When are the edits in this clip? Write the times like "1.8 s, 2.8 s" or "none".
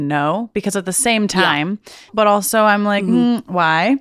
2.1 s